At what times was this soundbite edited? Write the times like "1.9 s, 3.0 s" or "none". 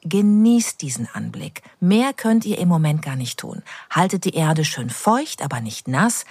1.7 s